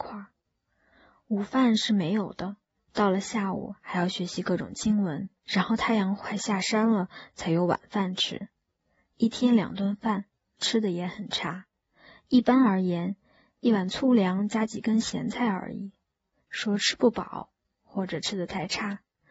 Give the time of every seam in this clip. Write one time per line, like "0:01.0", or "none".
0:05.4
0:16.4